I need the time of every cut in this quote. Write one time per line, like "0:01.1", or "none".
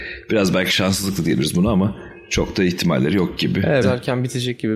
0:03.8